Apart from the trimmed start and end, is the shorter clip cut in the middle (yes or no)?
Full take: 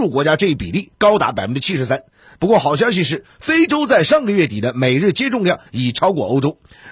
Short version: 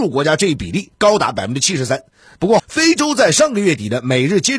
yes